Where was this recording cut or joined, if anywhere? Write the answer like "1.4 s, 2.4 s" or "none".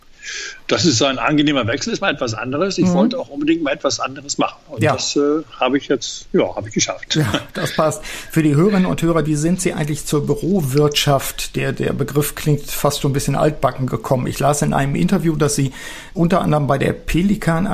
9.2 s, 16.1 s